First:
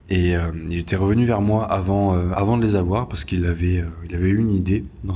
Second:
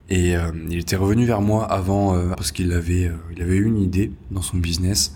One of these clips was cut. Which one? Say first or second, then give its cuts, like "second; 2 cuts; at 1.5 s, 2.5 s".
second; 1 cut; at 2.3 s